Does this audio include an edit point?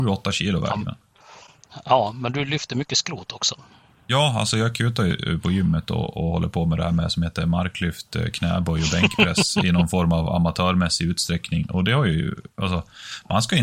no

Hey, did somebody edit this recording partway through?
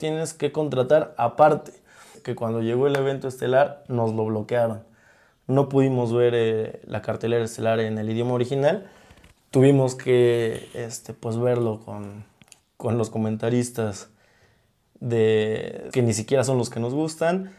yes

